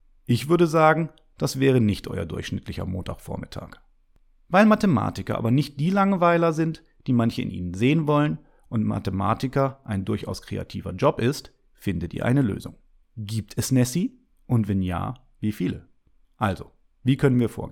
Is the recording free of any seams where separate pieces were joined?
no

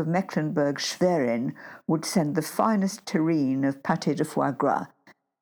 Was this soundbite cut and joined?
no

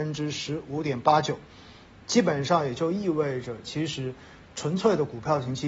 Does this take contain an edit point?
no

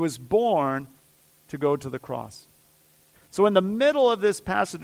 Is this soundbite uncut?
no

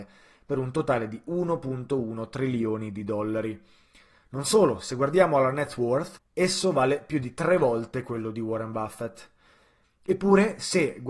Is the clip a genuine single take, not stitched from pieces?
no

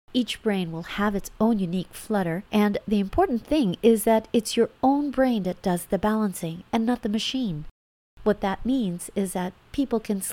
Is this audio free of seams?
yes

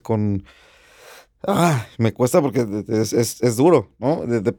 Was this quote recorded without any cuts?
yes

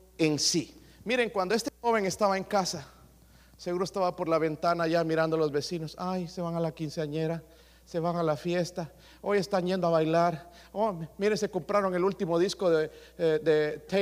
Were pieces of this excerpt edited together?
no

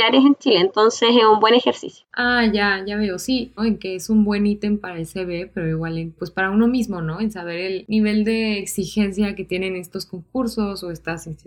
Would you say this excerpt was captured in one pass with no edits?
no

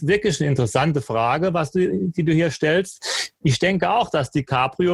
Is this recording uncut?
yes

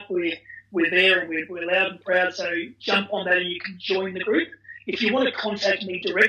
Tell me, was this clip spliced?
no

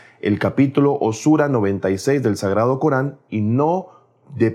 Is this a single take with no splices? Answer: yes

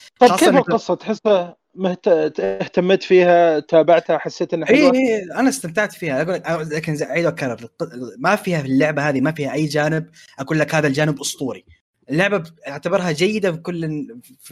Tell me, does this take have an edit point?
no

